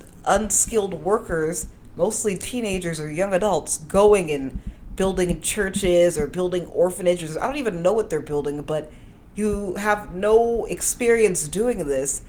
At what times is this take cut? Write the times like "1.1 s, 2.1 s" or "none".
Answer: none